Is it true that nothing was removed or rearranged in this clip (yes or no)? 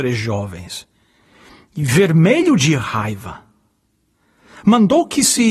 yes